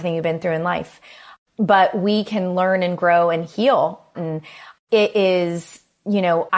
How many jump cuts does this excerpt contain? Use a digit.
1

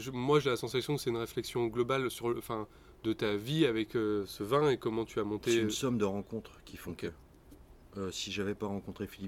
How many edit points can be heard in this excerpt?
0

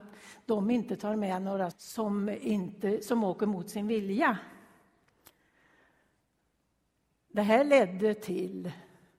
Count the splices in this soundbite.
1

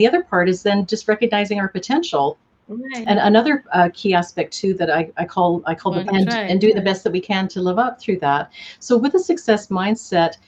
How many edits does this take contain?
3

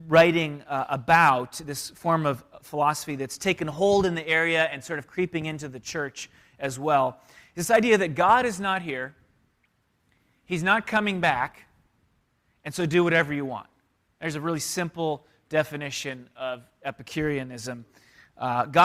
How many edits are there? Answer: 0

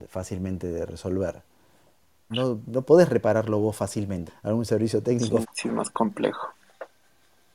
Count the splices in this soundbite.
3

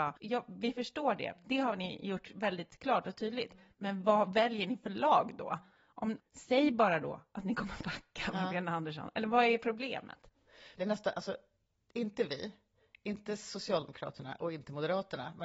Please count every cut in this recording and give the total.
2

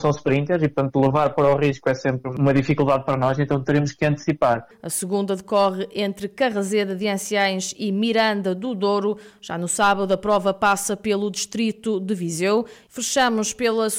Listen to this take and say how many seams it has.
2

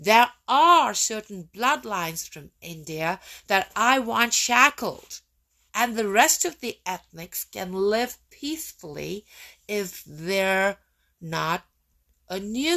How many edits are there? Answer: 1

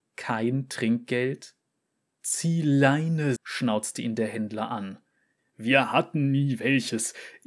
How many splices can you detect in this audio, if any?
2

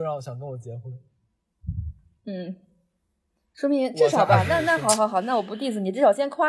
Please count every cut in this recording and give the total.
0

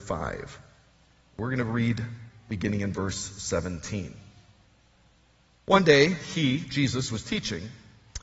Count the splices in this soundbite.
0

